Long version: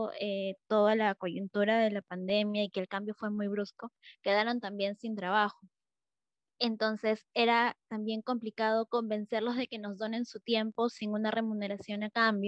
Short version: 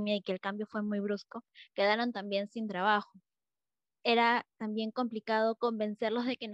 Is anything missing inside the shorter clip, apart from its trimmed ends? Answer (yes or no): yes